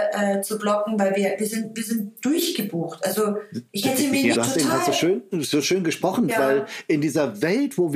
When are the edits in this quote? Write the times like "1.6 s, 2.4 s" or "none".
4.3 s, 6.3 s